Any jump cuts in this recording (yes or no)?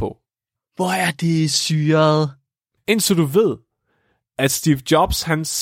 yes